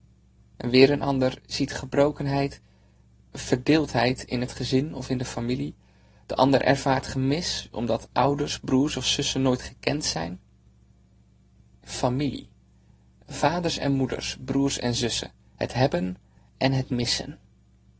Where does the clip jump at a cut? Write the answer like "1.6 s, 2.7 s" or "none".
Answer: 11.8 s

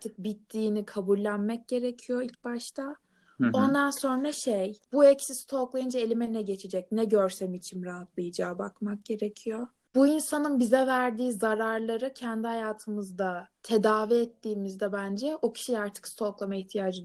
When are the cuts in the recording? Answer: none

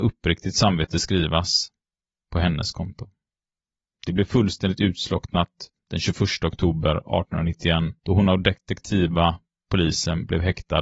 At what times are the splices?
3.9 s, 8.0 s

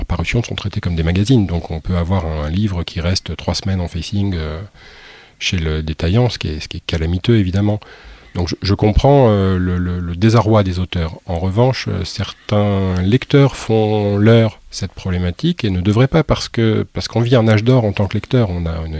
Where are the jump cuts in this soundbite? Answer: none

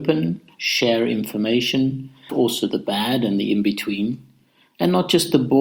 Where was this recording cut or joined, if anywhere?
2.3 s

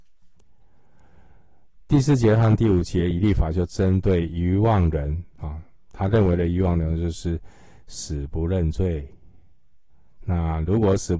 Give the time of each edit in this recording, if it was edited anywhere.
none

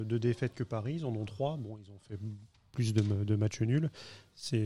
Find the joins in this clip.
none

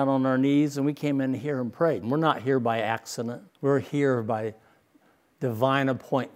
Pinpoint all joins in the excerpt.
2.0 s, 3.5 s

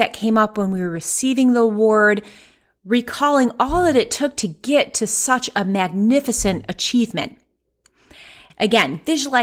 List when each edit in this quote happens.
8.5 s

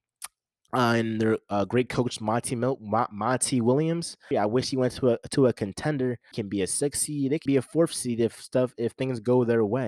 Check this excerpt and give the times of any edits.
4.3 s, 6.3 s, 7.5 s

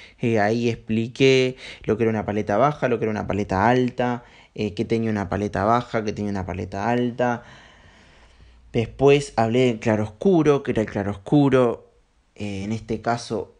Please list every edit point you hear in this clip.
none

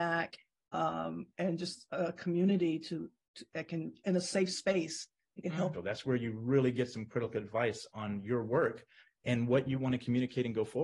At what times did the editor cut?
5.7 s, 7.9 s

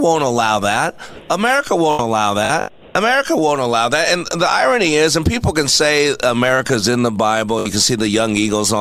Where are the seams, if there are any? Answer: none

